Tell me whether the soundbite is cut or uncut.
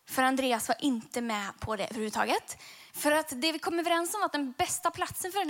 cut